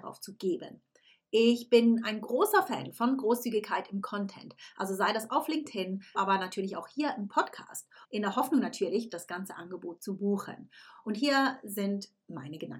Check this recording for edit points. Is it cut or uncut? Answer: cut